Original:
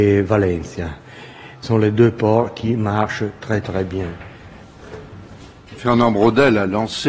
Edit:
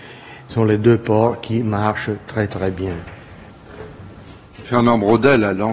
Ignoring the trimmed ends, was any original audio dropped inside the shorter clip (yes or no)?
no